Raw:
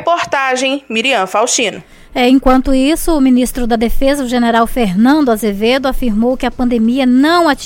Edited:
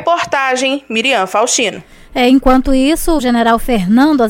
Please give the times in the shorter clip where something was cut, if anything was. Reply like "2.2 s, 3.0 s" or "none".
3.2 s